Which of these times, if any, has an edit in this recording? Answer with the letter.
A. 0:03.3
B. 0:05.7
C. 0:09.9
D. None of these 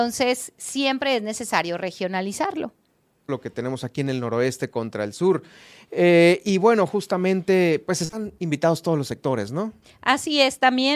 A